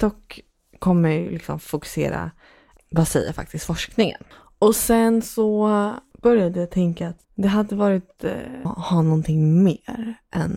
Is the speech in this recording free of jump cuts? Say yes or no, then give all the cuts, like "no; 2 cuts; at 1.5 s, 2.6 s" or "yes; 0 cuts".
no; 2 cuts; at 2.8 s, 8.7 s